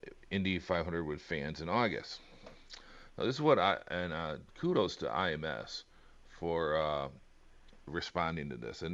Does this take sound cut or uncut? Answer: cut